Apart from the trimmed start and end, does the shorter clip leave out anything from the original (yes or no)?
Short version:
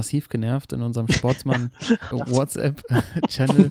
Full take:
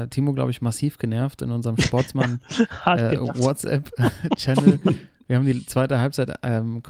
yes